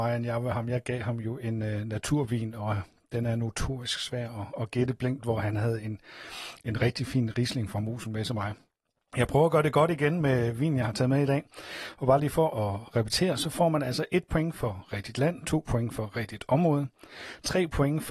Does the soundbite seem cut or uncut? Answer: uncut